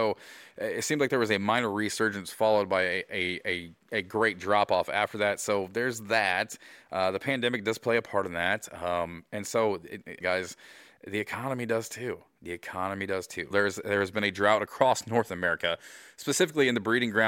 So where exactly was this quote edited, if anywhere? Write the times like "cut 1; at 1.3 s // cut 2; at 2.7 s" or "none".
cut 1; at 10.2 s // cut 2; at 13.5 s